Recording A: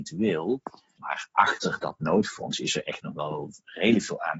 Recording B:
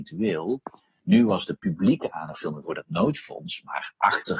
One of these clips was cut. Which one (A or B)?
A